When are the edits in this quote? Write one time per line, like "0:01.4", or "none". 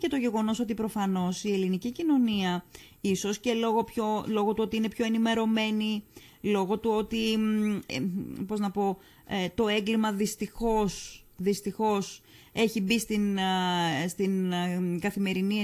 0:07.9